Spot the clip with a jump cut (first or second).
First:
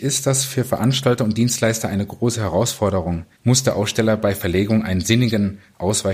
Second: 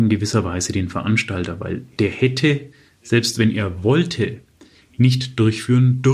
first